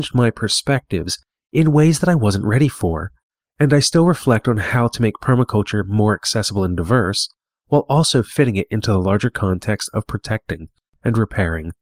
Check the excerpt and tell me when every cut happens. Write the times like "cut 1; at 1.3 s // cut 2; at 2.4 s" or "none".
none